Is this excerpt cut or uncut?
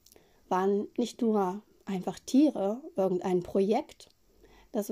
uncut